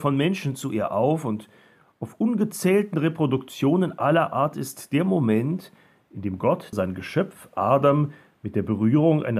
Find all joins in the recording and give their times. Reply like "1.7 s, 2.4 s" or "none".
6.7 s